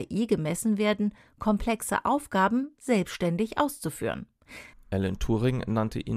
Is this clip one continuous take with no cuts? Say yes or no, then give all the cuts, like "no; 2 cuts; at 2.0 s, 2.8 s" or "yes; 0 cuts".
no; 1 cut; at 4.7 s